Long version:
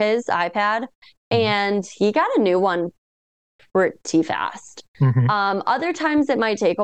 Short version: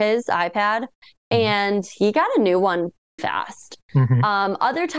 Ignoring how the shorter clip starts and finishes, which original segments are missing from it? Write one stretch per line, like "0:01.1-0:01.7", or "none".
0:03.2-0:04.2